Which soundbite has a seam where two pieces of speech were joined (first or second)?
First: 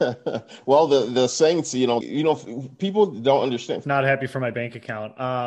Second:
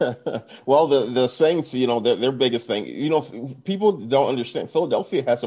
first